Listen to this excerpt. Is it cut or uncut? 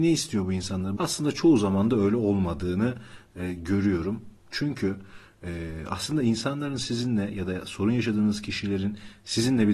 cut